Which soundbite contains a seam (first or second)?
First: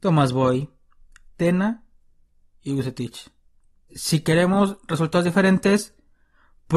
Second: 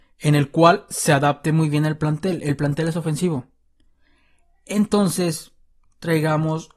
first